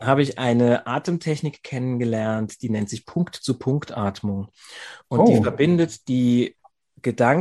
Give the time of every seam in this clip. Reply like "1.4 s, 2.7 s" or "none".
none

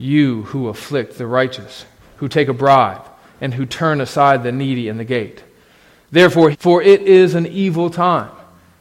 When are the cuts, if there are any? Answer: 6.5 s

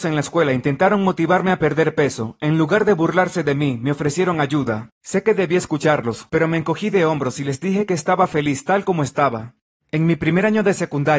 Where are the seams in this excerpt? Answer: 6.3 s

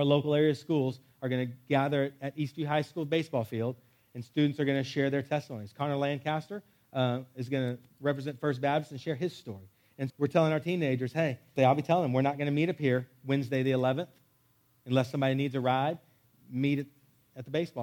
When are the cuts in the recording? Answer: 10.1 s, 11.6 s

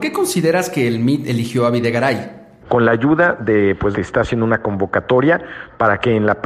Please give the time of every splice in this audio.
2.6 s, 3.9 s

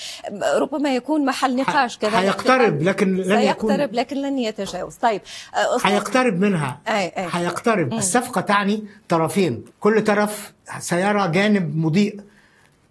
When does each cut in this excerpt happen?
7.9 s, 9.7 s

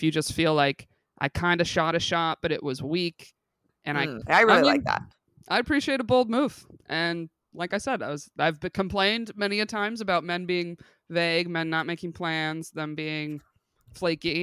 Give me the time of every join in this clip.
4.2 s

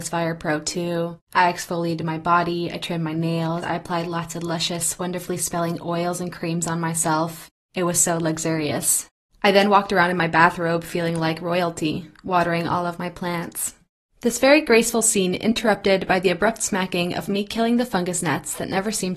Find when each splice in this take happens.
3.6 s

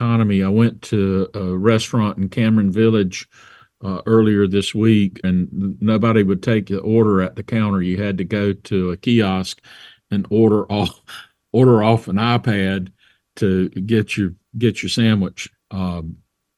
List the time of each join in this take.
5.2 s, 15.5 s

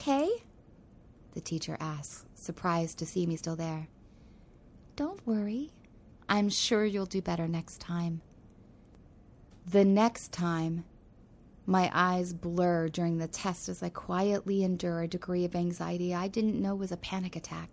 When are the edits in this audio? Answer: none

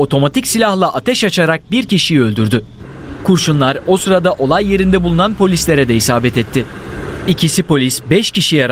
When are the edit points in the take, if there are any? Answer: none

